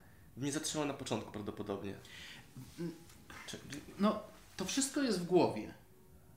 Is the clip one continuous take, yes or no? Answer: yes